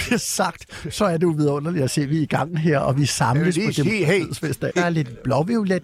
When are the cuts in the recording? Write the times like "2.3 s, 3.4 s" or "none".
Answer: 4.7 s